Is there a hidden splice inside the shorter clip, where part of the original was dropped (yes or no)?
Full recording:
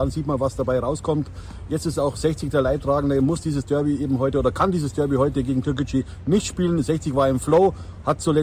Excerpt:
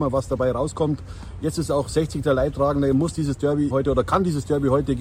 yes